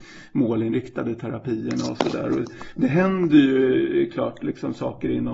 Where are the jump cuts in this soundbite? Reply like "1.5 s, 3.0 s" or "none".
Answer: none